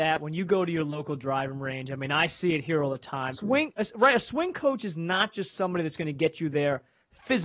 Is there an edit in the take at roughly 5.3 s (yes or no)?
no